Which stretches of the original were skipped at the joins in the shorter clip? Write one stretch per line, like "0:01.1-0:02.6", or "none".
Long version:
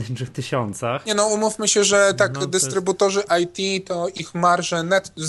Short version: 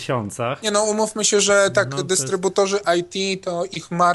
none